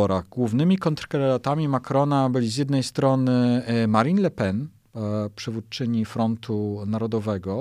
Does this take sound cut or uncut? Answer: uncut